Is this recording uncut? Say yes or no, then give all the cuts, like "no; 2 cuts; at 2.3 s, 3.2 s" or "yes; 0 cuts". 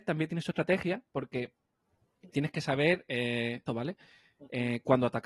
no; 2 cuts; at 2.3 s, 3.7 s